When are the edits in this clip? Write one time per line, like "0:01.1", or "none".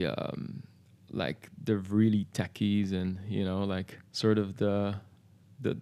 0:04.1